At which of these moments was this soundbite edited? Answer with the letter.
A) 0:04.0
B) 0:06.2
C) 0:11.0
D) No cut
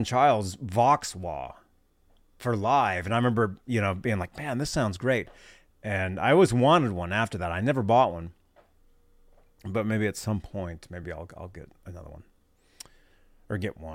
D